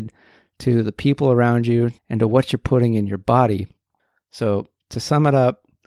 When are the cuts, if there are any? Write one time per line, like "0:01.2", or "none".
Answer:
0:02.0